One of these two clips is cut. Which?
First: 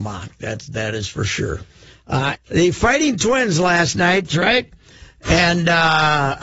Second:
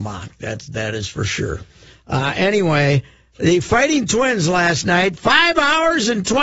first; 2 cuts; at 2.3 s, 4.3 s

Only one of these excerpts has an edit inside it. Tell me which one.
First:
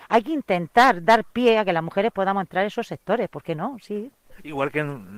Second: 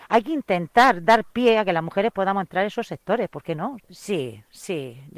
second; 1 cut; at 3.8 s

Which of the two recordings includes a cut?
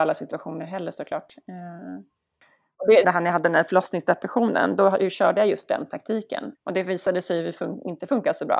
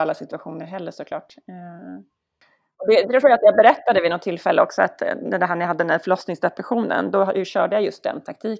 first; 2 cuts; at 3.0 s, 6.5 s

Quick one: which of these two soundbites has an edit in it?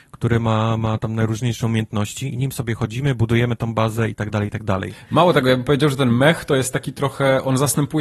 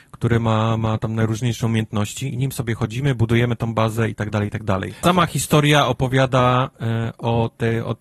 second; 1 cut; at 5.0 s

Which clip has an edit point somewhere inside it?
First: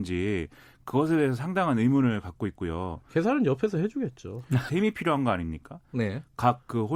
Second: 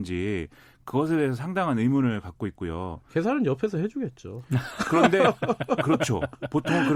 first; 1 cut; at 4.7 s

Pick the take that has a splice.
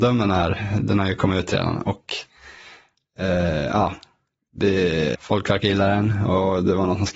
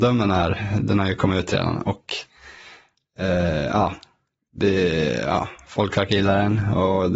first; 1 cut; at 5.1 s

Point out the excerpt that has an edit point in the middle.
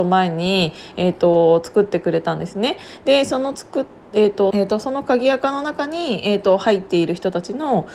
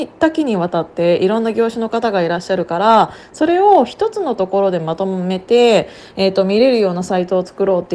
first; 1 cut; at 4.5 s

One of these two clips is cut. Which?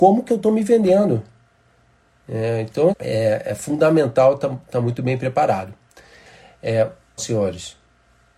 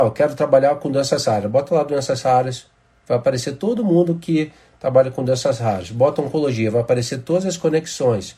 first; 2 cuts; at 2.9 s, 7.2 s

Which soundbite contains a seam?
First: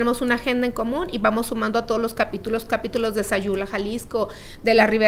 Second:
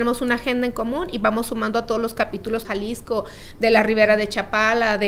second; 1 cut; at 2.6 s

